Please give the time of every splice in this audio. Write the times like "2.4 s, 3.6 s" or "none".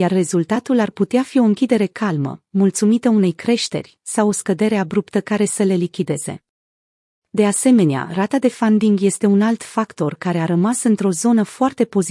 none

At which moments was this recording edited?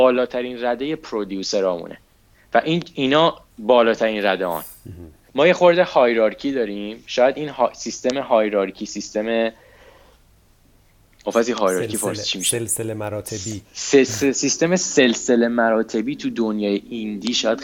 5.3 s, 13.6 s

